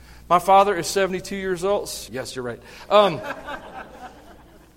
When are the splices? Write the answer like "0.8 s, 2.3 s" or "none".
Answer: 2.1 s